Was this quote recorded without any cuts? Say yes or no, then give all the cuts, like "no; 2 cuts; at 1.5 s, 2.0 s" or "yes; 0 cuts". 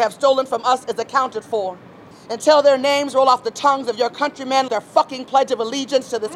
no; 2 cuts; at 2.1 s, 4.7 s